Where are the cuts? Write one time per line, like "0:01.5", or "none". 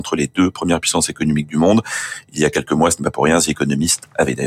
none